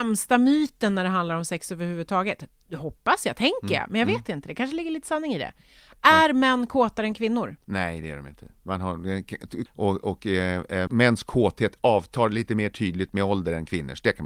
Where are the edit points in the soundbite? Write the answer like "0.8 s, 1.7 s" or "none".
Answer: 9.7 s, 10.9 s